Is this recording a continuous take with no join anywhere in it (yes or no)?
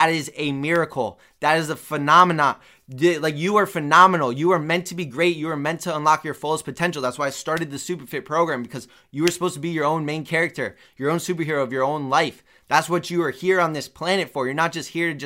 yes